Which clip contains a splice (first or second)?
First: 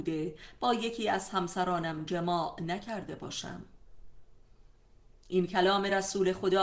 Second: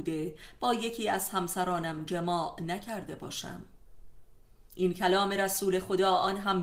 second